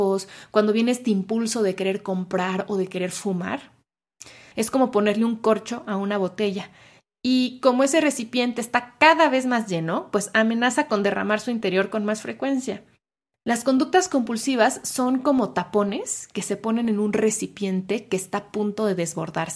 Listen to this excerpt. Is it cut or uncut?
cut